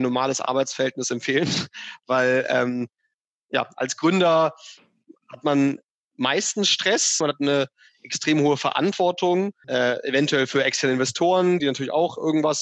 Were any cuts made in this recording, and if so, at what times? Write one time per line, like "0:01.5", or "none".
0:07.2
0:09.6
0:11.6

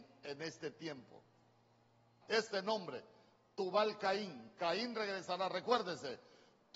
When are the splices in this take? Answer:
0:02.2

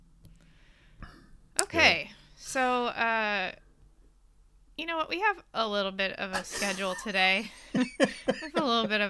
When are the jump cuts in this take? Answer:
none

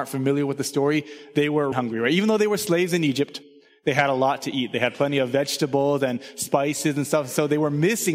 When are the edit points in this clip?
0:01.7

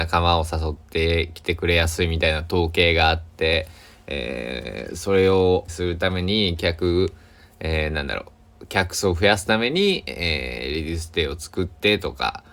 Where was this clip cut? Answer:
0:05.7

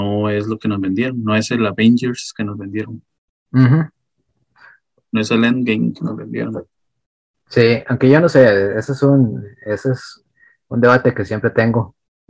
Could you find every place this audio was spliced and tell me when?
none

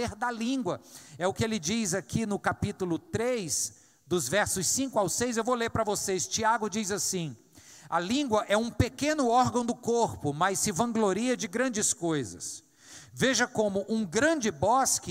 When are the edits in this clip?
none

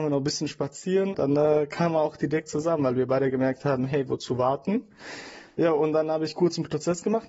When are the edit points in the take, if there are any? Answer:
0:01.1

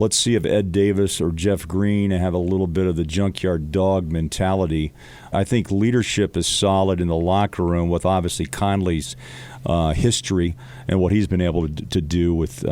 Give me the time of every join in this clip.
0:05.3

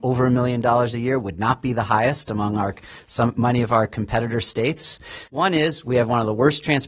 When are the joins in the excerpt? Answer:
0:05.3

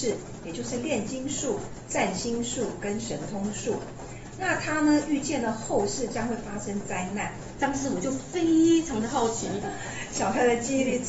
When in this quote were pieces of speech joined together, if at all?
0:07.6

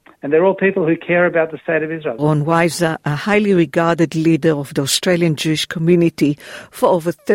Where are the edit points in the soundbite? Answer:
0:02.2

